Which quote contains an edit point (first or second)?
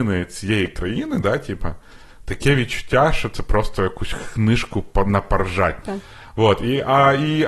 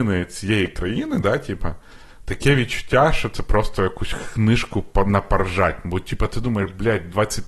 first